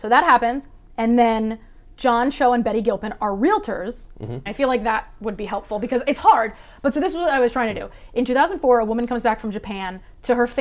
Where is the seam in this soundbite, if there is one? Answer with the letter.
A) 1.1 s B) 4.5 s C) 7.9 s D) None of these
B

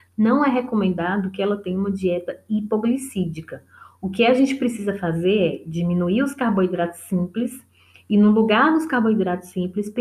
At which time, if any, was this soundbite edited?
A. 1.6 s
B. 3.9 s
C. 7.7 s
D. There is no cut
D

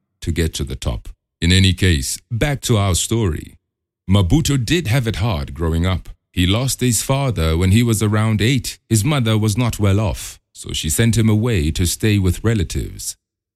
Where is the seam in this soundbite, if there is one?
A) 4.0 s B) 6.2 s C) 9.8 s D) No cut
D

